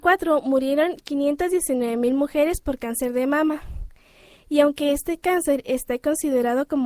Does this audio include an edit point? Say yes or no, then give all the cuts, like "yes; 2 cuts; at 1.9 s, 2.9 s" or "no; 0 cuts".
no; 0 cuts